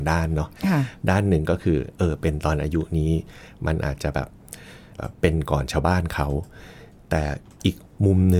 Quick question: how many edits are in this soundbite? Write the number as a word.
one